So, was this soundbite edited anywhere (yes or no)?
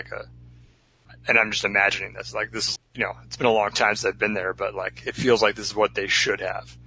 yes